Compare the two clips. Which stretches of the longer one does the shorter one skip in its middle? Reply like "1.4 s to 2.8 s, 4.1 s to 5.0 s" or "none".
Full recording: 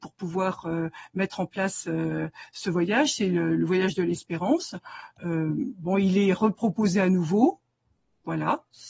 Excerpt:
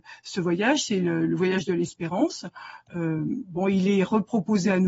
none